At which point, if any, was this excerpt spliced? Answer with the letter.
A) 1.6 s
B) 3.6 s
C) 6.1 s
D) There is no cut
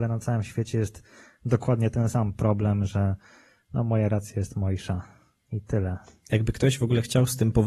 D